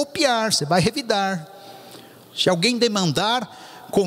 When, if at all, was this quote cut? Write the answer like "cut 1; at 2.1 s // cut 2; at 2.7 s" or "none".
cut 1; at 2.2 s